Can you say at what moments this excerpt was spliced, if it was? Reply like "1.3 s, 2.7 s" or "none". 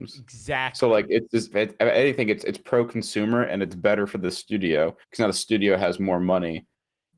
1.5 s, 5.0 s

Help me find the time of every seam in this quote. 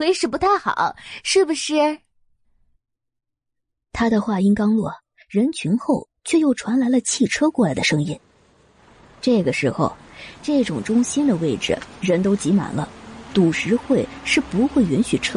13.3 s

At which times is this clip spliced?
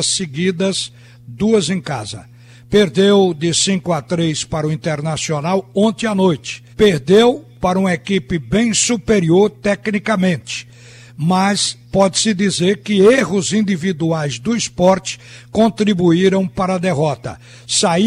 6.7 s

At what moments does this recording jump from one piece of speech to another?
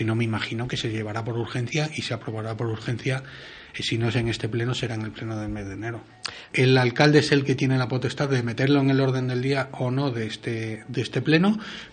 6.5 s

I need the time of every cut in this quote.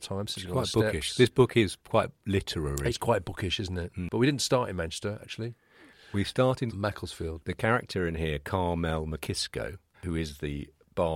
6.7 s, 9.9 s

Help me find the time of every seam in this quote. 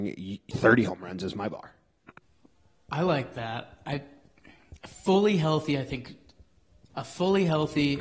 none

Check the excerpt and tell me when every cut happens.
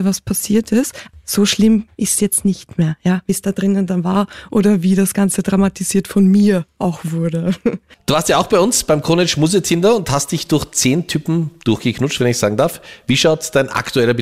none

